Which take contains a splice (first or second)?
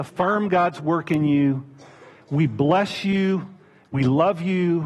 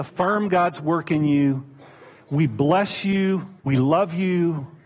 second